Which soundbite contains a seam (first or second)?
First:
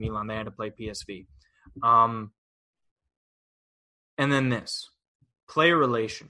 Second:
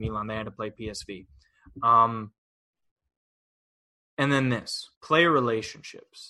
second